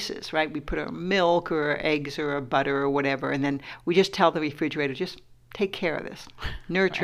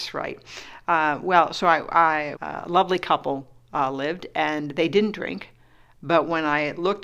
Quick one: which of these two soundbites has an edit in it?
second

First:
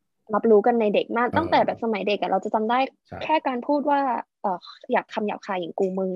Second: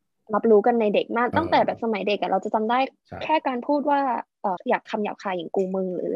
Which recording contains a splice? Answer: second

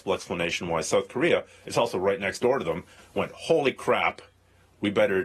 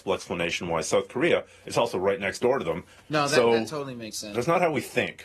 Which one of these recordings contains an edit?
second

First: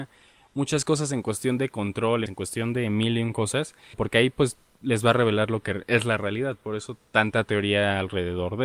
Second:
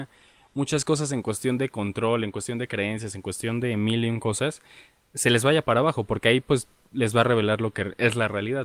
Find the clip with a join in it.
first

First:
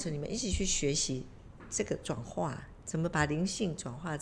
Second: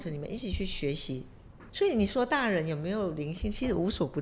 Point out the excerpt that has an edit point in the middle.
second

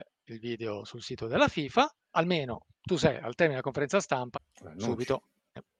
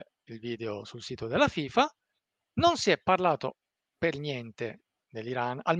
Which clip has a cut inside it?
first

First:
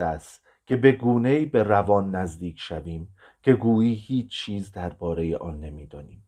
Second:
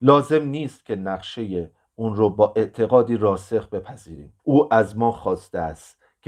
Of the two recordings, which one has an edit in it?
second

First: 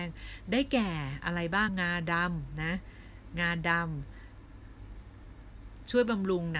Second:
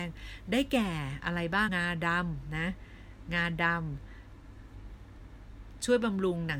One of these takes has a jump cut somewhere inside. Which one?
second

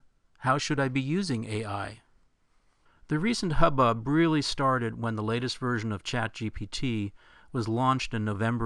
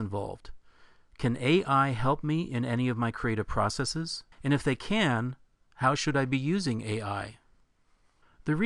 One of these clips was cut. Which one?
second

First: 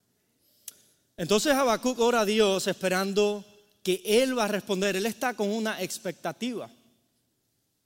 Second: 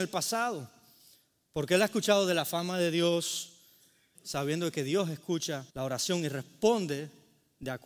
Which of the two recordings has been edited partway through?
second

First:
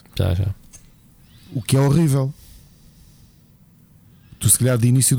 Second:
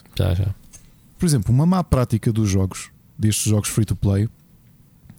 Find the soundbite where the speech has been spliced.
second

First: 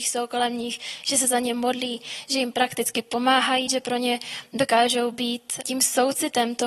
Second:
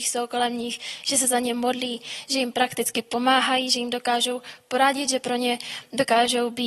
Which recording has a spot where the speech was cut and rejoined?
first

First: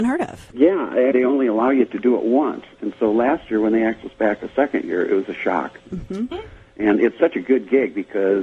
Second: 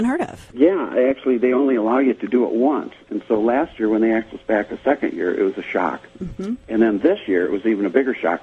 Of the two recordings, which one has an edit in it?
first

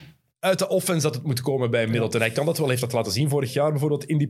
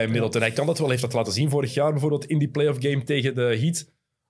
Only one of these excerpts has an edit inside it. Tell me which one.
second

